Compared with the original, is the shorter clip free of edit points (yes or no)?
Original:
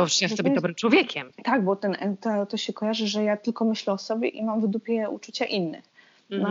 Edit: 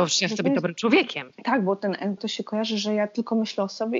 no